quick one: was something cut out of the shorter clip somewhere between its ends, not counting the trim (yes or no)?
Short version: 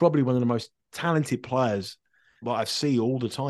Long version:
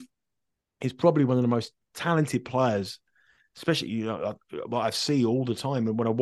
yes